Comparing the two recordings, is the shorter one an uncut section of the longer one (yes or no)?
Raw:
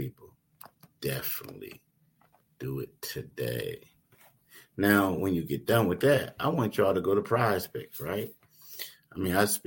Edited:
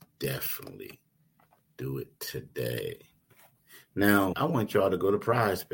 no